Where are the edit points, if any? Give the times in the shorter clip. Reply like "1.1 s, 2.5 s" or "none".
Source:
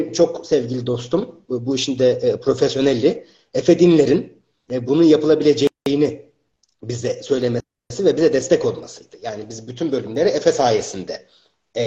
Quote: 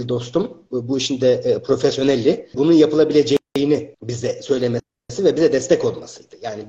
2.5 s, 3.9 s